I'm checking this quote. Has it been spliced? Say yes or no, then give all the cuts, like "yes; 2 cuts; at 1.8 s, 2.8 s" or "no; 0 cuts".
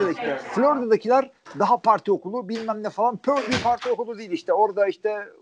no; 0 cuts